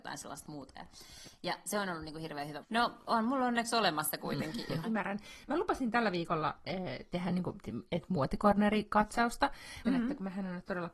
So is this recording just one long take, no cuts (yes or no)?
no